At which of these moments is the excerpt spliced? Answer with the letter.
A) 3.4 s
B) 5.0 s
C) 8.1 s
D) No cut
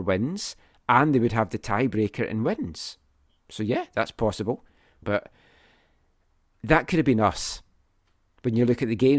B